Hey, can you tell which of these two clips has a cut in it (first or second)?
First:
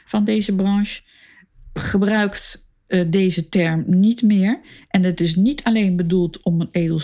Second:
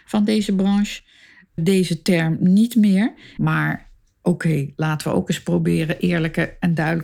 second